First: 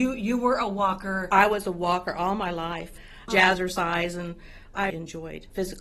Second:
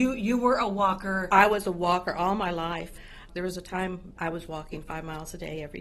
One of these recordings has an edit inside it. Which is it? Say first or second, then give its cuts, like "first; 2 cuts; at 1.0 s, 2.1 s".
first; 2 cuts; at 3.3 s, 4.9 s